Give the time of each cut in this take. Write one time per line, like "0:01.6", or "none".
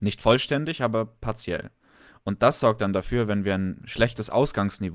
none